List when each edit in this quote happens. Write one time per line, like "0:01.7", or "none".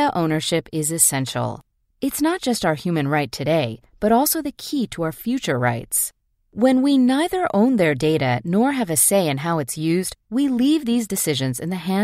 none